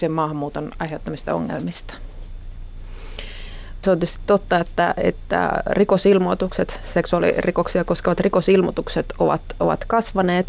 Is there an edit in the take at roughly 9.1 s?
no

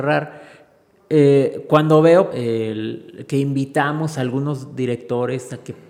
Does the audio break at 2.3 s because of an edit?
yes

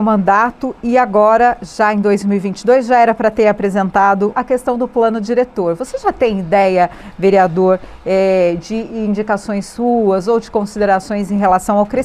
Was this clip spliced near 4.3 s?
yes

